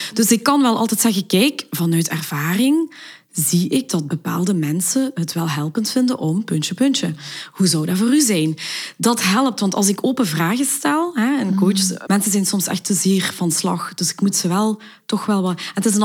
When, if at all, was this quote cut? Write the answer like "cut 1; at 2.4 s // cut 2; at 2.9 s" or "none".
cut 1; at 12.1 s